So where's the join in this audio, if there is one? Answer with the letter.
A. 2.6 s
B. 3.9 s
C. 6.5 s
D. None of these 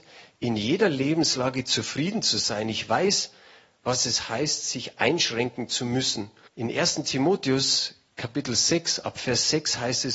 C